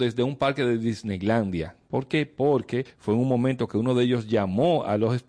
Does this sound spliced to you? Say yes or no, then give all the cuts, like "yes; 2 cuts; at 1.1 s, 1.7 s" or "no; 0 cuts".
no; 0 cuts